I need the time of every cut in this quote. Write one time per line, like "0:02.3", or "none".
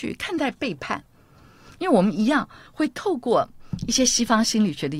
none

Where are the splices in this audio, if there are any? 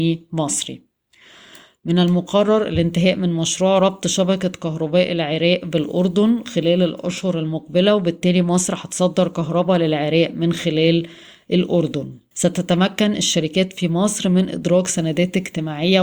0:12.3

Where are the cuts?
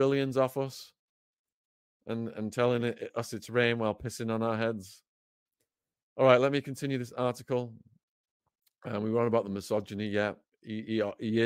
none

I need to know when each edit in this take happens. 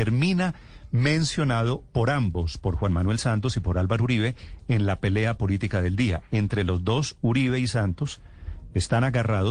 none

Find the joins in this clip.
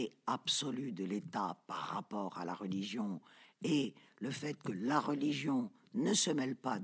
none

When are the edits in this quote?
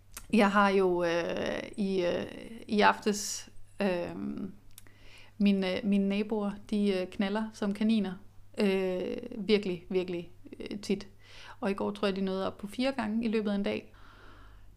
none

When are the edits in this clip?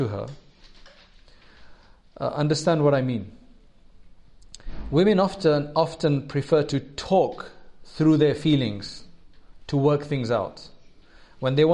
none

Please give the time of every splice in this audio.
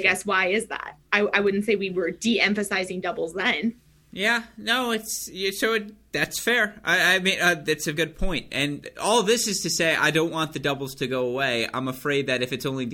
0:07.9

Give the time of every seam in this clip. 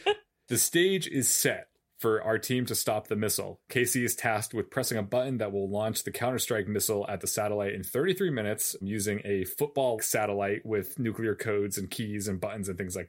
0:01.8
0:08.8
0:10.0

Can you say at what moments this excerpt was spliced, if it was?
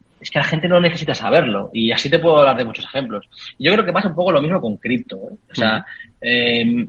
none

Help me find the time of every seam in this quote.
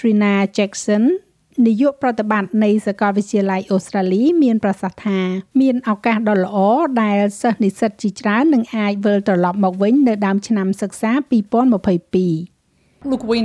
0:05.5

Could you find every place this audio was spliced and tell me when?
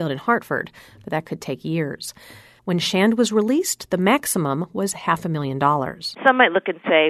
0:02.6
0:06.1

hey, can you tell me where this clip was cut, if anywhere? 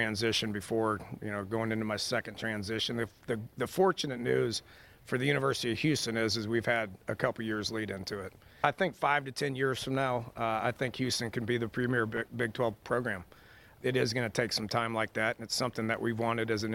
none

